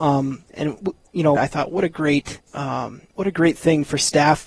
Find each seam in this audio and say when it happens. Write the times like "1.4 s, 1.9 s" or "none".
1.4 s, 2.5 s